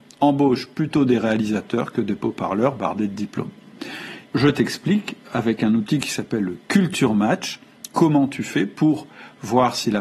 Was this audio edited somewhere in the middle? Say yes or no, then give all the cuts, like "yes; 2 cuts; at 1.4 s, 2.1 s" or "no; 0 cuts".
yes; 1 cut; at 4.3 s